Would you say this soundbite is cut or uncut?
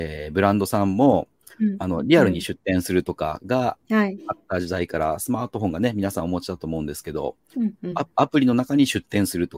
uncut